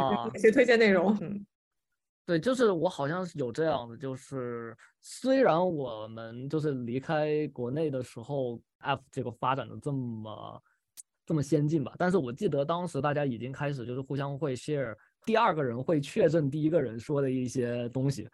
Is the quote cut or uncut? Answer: cut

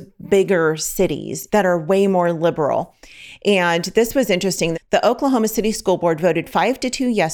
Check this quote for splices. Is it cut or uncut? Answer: cut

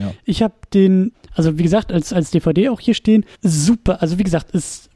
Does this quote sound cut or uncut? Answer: cut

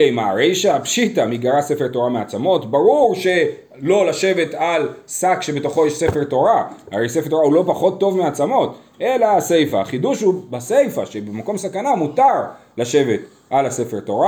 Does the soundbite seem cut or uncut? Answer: uncut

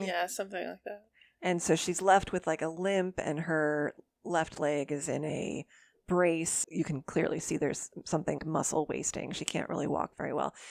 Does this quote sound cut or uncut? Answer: cut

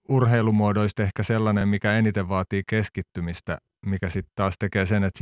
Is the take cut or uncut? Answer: uncut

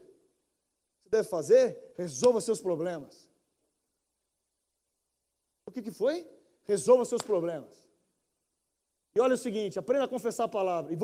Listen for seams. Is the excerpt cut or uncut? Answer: uncut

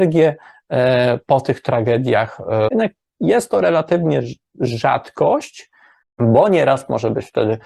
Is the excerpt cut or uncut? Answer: cut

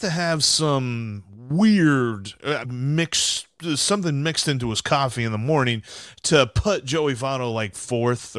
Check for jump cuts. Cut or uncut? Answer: cut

